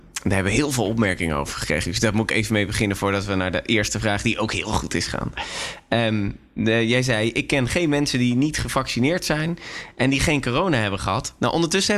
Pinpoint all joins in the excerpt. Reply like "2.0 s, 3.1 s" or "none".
none